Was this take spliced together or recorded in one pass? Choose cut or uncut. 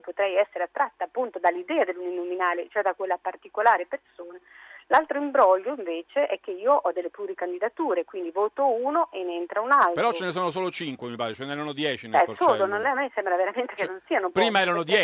uncut